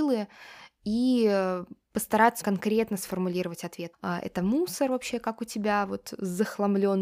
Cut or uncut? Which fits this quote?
cut